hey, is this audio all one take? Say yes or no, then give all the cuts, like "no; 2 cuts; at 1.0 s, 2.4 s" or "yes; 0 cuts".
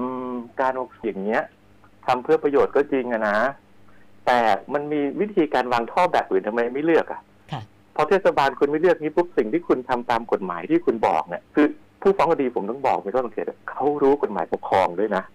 no; 2 cuts; at 1.0 s, 11.5 s